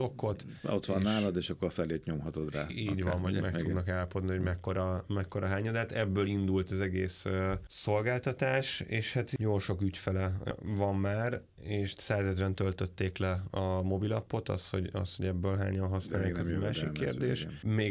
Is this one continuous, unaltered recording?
yes; 0 cuts

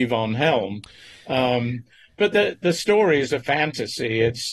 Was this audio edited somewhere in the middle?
no; 0 cuts

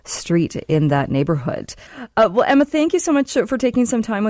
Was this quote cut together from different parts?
yes; 1 cut; at 1.9 s

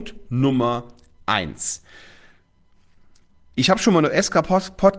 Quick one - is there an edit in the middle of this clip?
no; 0 cuts

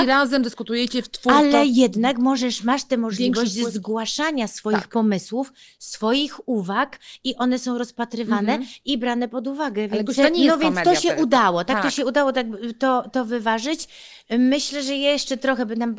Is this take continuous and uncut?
no; 1 cut; at 10.2 s

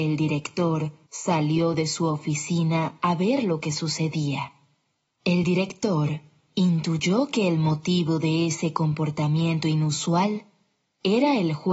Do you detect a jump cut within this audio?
yes; 2 cuts; at 1.1 s, 5.0 s

